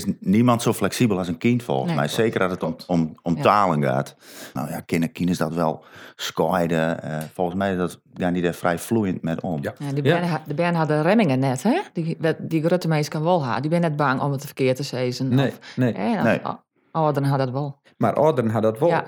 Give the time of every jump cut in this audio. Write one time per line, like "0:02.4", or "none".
0:04.6